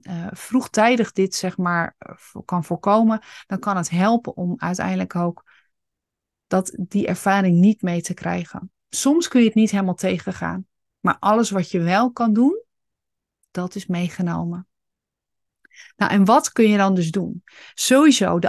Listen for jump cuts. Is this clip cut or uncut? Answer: uncut